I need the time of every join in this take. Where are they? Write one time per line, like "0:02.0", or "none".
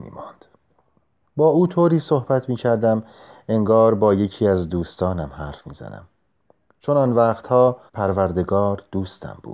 0:01.2
0:07.9